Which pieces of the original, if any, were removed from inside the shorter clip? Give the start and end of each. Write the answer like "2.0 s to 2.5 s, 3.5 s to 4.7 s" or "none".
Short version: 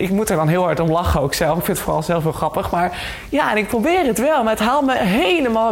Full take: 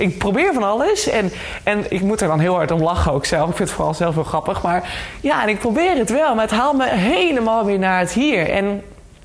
none